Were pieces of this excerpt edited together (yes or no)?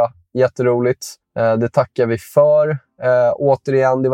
yes